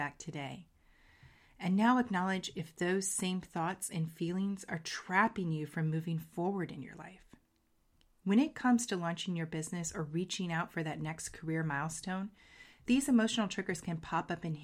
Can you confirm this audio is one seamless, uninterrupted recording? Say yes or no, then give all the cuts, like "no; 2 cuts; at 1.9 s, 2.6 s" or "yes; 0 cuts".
yes; 0 cuts